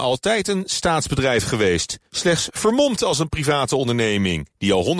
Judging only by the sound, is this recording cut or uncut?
uncut